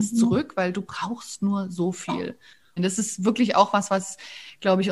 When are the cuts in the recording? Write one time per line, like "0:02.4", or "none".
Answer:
0:02.8